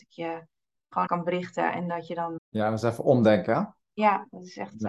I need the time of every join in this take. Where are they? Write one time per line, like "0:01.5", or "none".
0:01.1
0:02.4